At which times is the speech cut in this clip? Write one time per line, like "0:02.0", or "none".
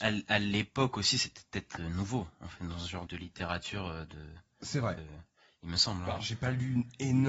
0:03.1
0:05.0